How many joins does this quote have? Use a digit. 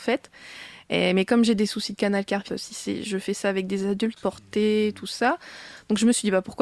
2